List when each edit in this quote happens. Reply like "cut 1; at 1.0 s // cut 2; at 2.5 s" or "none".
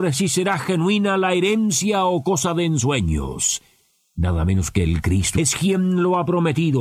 cut 1; at 5.4 s